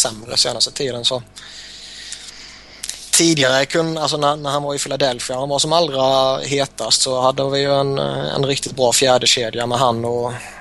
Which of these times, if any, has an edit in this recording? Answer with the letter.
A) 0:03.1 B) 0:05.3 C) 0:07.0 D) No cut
D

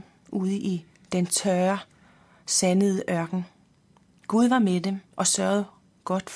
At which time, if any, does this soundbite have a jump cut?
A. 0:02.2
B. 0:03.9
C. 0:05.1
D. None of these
C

